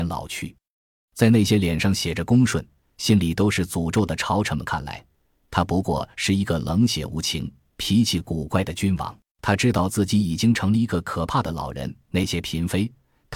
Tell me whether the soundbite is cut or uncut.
cut